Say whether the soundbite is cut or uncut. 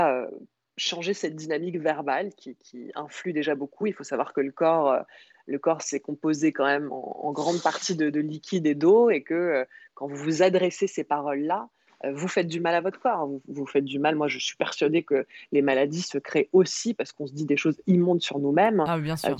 uncut